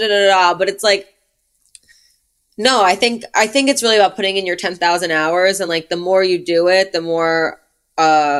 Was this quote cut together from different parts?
no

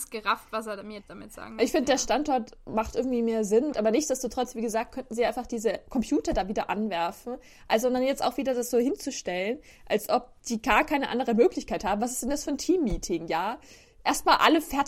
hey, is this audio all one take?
no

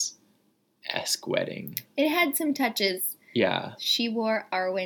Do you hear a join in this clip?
yes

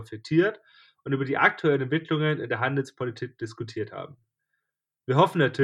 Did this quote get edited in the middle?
no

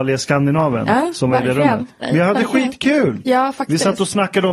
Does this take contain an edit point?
yes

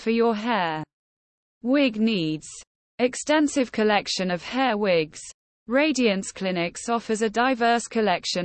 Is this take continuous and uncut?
yes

